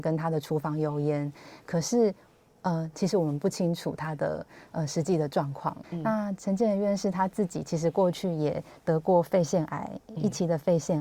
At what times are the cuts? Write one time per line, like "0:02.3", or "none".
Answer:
0:02.9
0:05.8